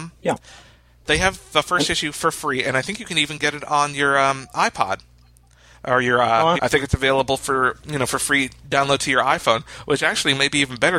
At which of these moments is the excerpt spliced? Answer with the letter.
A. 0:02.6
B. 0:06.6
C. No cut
B